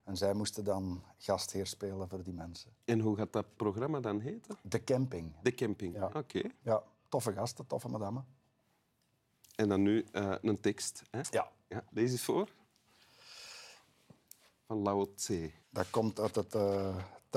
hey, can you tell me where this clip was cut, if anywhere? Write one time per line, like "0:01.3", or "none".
0:06.1
0:15.6